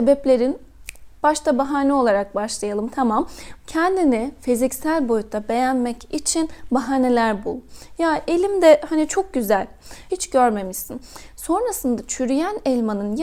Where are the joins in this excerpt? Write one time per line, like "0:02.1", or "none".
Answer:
0:03.6
0:10.1